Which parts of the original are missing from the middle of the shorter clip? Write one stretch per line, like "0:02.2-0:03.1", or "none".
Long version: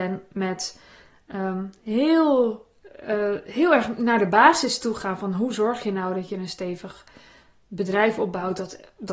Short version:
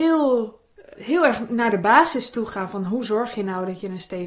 0:03.0-0:03.4

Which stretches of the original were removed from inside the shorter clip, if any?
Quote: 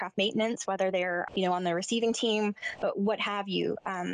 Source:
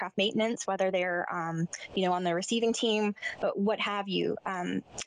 0:01.3-0:01.9

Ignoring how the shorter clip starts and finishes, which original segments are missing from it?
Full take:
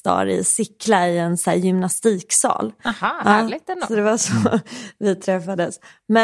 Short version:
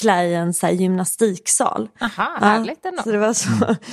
none

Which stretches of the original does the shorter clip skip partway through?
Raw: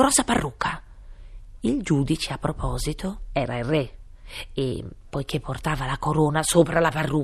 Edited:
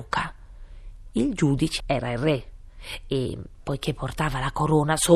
0:02.3-0:03.3

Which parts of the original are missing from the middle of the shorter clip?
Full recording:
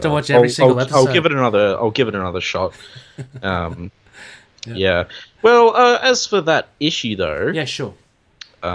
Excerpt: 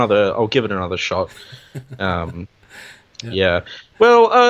none

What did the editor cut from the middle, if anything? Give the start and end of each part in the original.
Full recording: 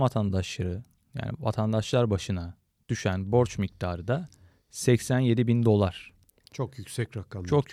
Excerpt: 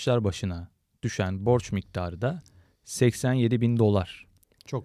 none

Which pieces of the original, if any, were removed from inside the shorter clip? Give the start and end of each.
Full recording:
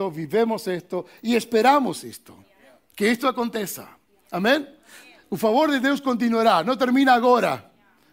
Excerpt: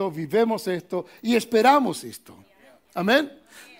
0:02.8-0:04.2

